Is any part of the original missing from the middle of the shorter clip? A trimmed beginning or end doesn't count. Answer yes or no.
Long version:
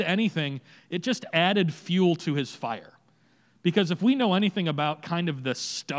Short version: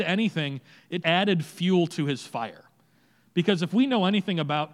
yes